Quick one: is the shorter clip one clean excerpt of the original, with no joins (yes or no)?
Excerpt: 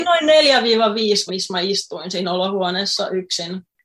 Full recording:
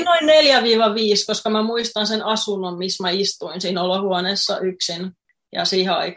no